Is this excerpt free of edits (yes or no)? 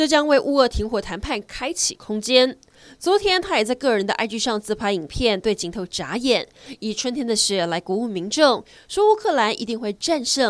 yes